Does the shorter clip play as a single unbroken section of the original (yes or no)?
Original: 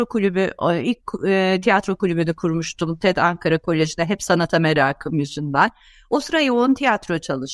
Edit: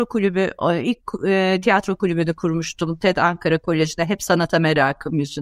yes